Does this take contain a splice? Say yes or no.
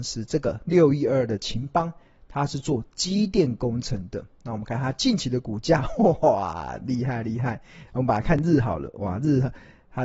no